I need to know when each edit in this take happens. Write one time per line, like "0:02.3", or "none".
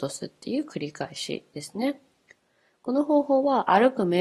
none